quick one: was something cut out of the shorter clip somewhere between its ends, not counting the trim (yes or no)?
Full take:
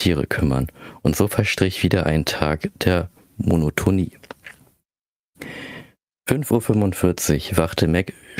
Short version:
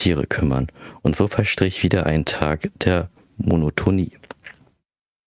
no